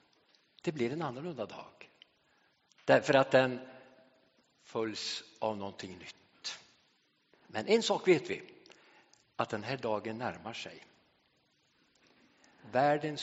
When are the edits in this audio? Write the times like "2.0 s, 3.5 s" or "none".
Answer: 7.3 s